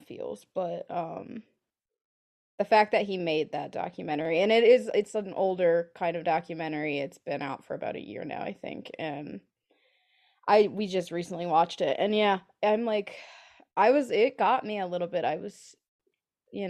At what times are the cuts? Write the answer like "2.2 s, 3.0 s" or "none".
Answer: none